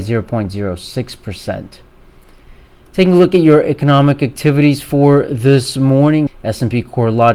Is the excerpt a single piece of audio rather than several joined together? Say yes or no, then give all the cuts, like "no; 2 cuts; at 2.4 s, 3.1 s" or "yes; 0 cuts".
no; 1 cut; at 6.3 s